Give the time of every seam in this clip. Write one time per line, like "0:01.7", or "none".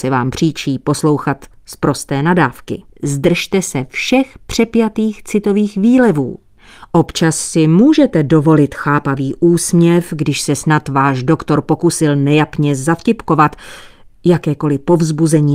0:02.9